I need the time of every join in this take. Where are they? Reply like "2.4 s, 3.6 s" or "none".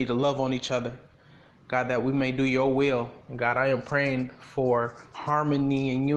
3.3 s